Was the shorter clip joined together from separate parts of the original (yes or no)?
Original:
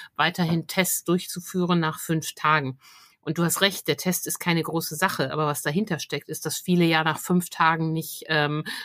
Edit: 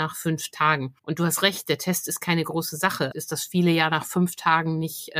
yes